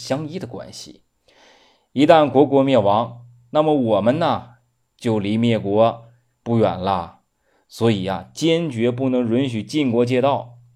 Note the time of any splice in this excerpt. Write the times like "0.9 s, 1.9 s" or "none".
none